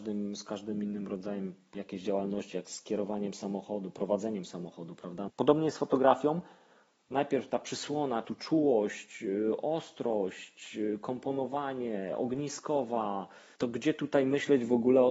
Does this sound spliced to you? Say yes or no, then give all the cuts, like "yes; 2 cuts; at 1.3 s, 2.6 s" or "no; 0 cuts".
yes; 3 cuts; at 5.3 s, 8.2 s, 13.6 s